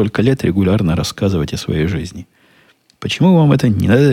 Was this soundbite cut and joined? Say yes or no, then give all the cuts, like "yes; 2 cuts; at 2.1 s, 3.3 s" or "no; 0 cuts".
no; 0 cuts